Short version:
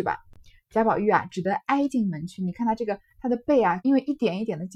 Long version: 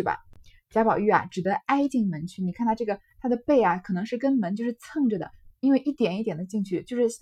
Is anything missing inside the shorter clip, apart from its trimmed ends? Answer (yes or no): yes